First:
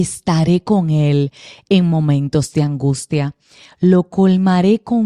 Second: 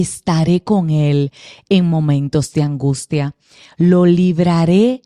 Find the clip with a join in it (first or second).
first